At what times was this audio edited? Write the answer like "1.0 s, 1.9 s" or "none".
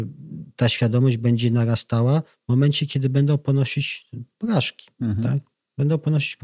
none